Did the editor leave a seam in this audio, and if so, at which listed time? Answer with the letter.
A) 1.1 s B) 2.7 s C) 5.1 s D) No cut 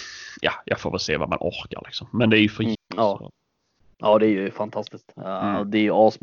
B